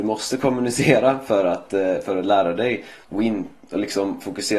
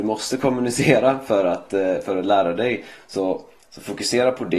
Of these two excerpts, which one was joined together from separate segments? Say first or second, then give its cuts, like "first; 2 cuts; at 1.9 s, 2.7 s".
first; 1 cut; at 3.0 s